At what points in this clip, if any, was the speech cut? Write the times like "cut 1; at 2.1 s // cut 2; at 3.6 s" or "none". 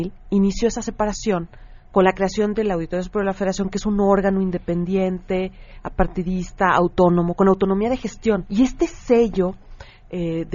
cut 1; at 8.5 s